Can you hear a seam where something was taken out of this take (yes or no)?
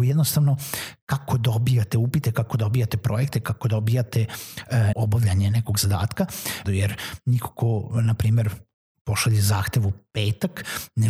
yes